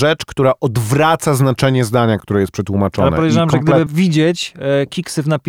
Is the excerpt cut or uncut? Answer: cut